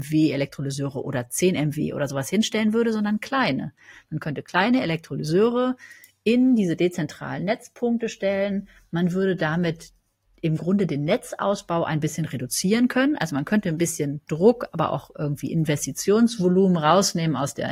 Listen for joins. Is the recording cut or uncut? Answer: uncut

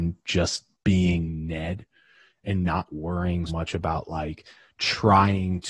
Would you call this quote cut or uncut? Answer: cut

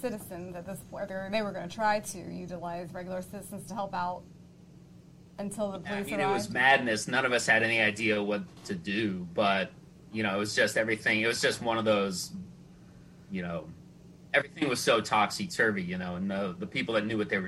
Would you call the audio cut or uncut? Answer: uncut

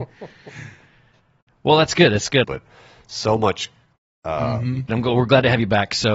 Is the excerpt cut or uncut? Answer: cut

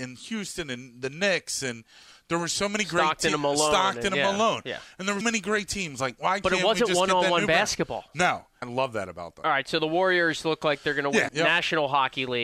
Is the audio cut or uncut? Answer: cut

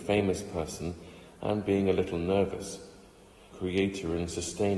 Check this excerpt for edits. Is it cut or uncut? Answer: cut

